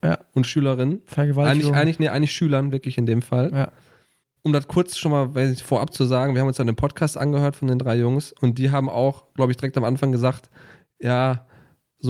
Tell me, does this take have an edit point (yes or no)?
no